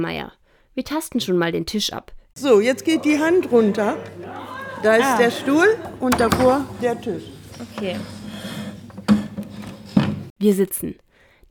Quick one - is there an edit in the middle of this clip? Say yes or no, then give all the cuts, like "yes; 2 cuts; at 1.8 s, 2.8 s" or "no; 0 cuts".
yes; 1 cut; at 2.3 s